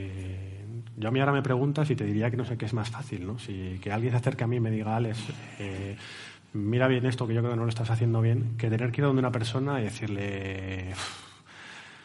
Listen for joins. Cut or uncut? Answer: uncut